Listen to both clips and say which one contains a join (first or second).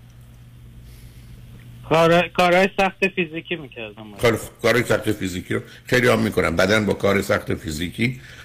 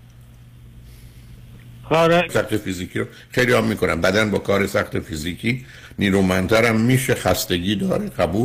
second